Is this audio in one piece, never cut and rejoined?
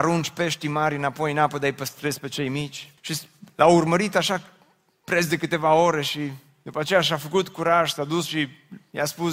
no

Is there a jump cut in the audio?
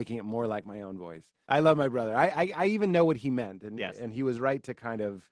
yes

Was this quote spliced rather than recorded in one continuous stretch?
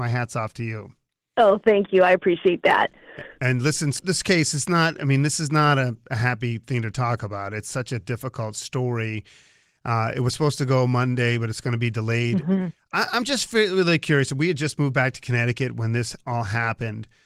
yes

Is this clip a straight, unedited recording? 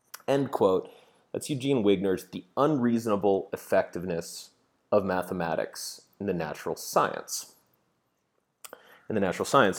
yes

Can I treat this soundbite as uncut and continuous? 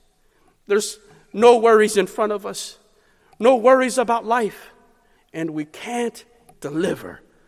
no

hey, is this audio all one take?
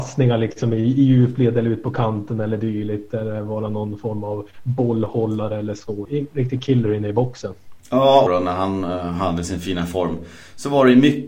no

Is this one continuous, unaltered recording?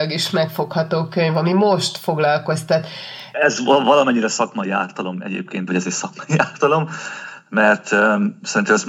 no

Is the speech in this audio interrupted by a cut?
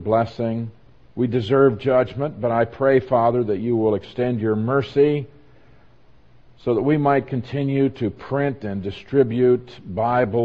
yes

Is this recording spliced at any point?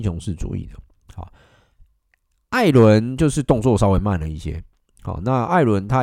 no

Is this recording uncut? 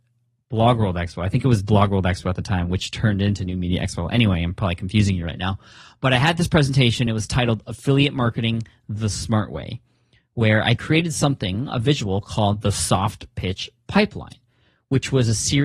yes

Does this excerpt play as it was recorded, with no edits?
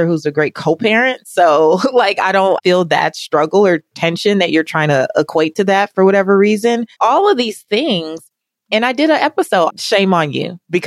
no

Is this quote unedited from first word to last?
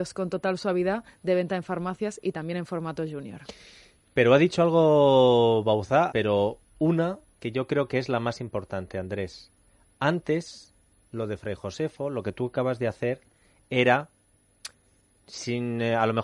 no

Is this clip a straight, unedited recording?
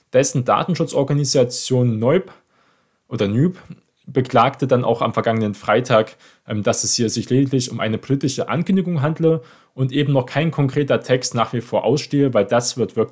yes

